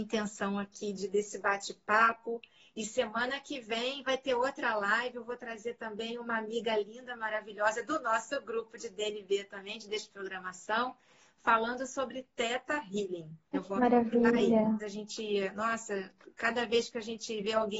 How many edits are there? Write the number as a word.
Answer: two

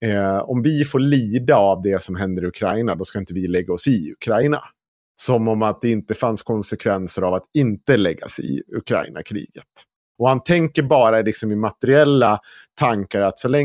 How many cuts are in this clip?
one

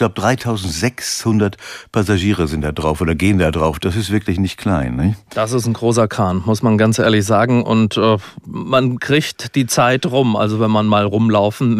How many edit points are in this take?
zero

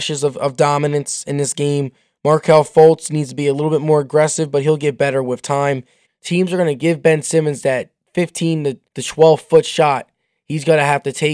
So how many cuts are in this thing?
two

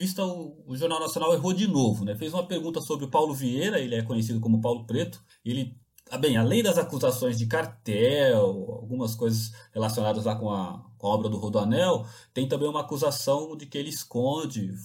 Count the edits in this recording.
zero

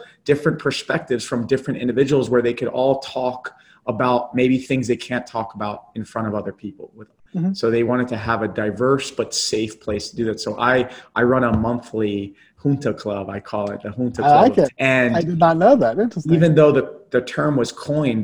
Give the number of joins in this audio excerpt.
one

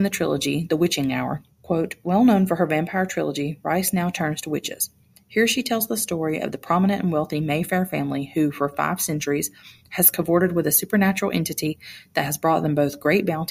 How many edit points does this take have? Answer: one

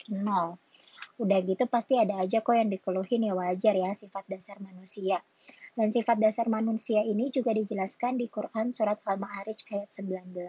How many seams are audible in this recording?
one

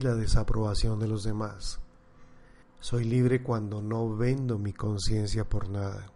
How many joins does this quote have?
one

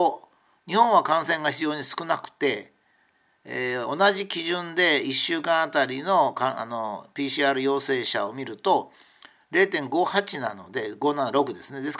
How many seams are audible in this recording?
zero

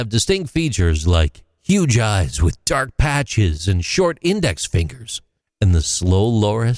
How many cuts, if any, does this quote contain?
one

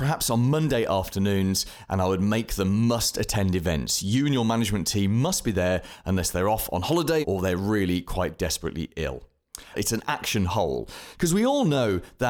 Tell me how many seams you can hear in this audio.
three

